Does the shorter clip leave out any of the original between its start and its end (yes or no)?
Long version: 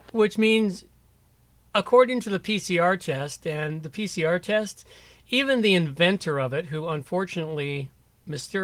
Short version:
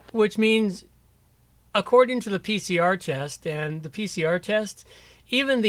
no